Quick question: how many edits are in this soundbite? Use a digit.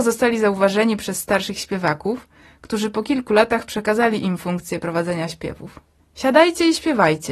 1